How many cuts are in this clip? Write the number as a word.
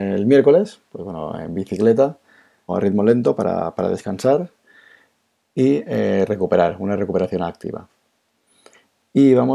one